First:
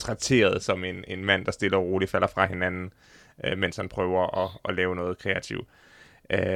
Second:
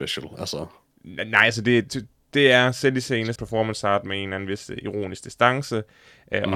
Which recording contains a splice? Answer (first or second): second